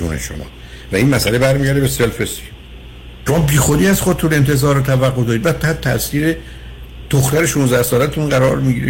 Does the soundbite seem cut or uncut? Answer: cut